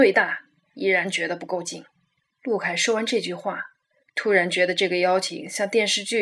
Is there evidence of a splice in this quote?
yes; 1 cut; at 2.3 s

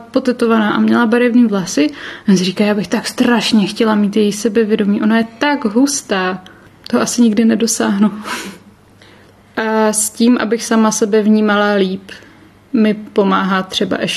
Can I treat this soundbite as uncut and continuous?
yes; 0 cuts

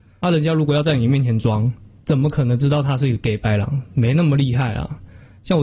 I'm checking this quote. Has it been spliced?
no; 0 cuts

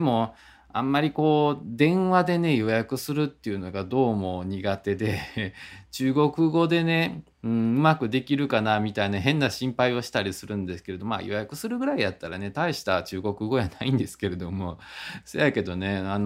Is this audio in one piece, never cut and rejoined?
yes; 0 cuts

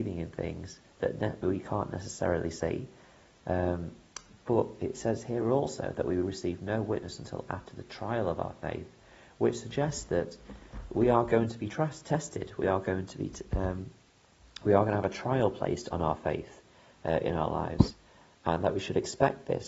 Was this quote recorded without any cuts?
yes; 0 cuts

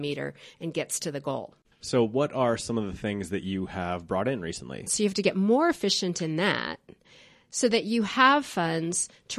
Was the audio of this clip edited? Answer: yes; 1 cut; at 4.9 s

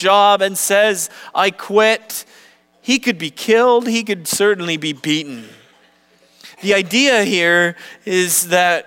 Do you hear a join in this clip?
no; 0 cuts

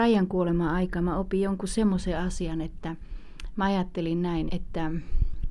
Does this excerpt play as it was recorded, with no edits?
no; 1 cut; at 4.5 s

